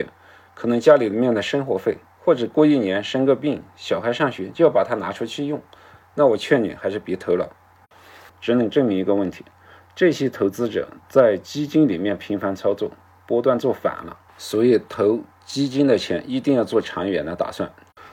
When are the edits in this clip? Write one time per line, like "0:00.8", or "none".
0:08.3
0:14.3

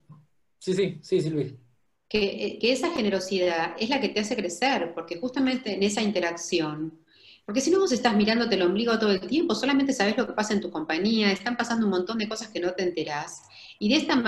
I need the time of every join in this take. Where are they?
none

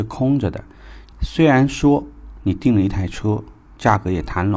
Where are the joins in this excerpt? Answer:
0:01.1

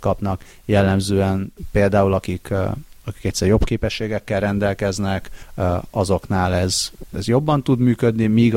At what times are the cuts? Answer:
0:07.1

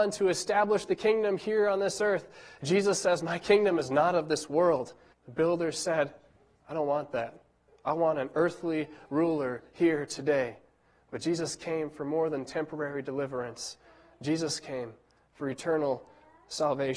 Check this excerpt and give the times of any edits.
0:05.1

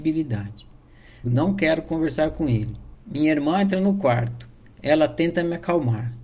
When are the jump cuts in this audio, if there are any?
0:01.2
0:02.9

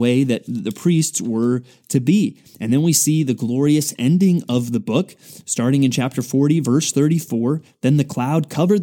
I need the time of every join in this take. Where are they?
none

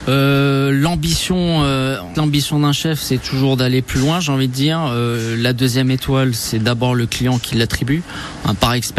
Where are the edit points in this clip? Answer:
0:02.1

